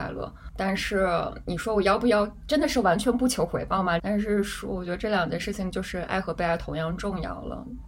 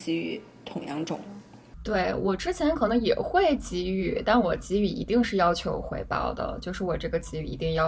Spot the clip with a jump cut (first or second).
first